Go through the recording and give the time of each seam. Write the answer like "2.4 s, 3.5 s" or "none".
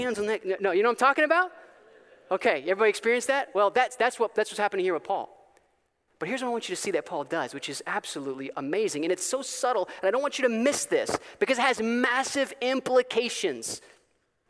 none

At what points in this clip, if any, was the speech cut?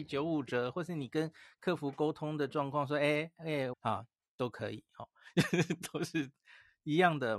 3.7 s

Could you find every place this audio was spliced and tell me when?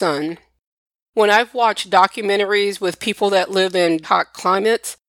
1.0 s, 4.0 s

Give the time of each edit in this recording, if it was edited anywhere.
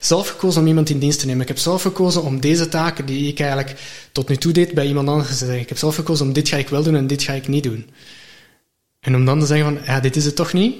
none

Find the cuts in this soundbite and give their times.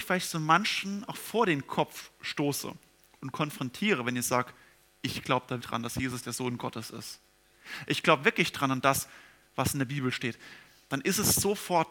5.6 s

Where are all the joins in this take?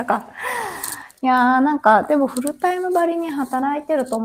none

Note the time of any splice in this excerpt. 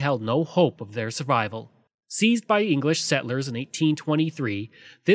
1.9 s

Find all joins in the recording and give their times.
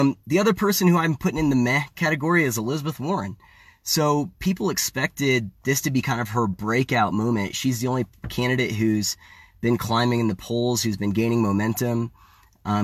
none

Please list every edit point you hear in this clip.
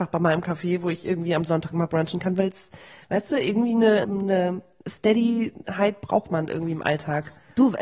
4.0 s

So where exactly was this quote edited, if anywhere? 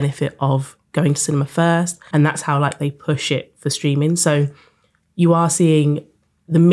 2.1 s

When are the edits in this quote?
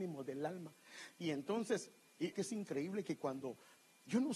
1.1 s, 2.3 s

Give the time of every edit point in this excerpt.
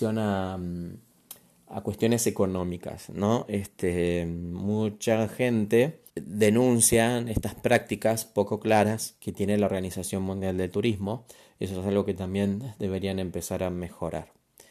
6.1 s

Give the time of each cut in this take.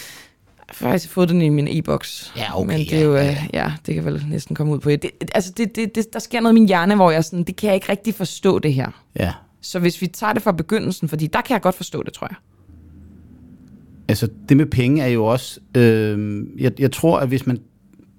5.0 s, 7.4 s

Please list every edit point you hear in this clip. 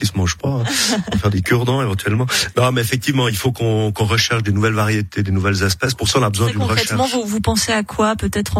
none

